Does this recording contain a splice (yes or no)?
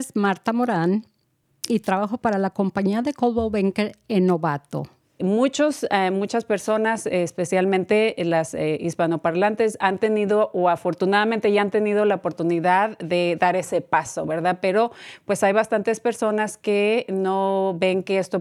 yes